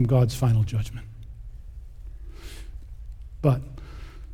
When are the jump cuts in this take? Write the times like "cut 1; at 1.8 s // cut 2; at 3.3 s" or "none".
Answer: cut 1; at 3.4 s